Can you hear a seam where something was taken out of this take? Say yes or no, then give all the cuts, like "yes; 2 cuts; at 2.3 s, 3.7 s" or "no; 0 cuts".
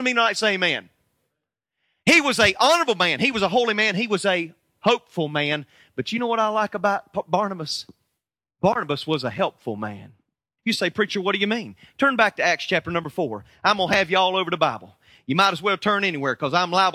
yes; 1 cut; at 10.6 s